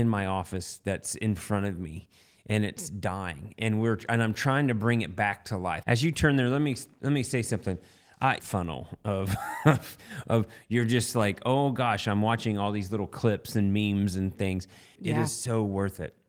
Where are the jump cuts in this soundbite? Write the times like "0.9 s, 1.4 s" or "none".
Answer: 5.8 s, 8.4 s, 15.0 s